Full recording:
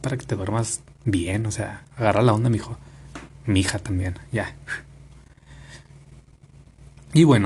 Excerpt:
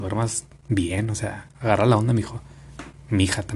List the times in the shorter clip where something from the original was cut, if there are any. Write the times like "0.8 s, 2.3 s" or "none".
none